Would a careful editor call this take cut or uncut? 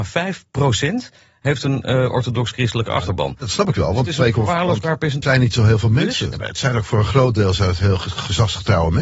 cut